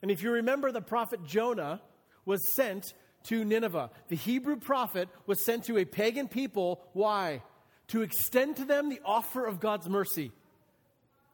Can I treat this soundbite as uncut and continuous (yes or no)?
yes